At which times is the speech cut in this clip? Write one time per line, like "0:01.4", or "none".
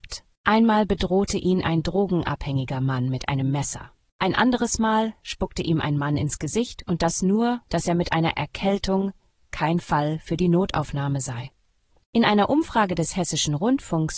0:07.7